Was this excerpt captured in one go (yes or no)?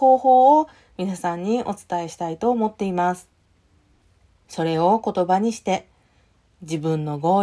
no